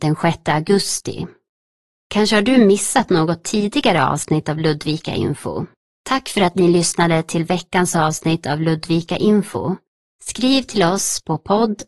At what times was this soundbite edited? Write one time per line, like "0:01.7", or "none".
0:06.0
0:10.1

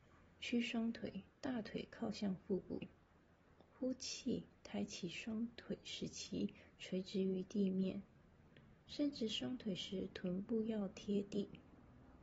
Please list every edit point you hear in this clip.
0:01.3

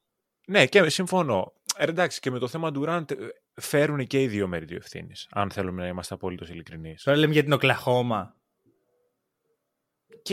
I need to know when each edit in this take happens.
none

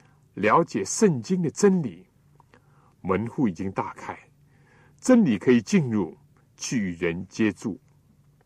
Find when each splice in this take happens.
0:06.4

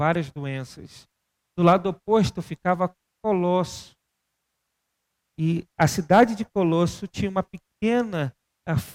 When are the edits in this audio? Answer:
none

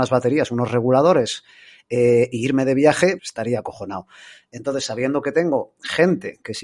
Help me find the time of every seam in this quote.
0:03.2

